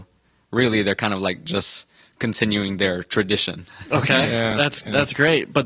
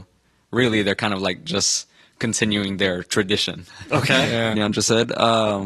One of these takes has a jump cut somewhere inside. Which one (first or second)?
second